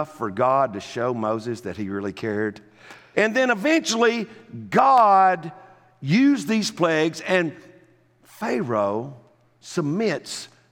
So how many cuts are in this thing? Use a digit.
1